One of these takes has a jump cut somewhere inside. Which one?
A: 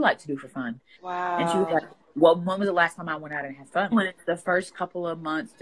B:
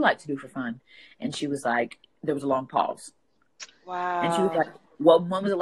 A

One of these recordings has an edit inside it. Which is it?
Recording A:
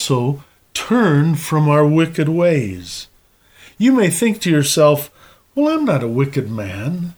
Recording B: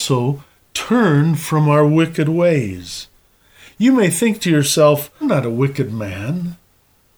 B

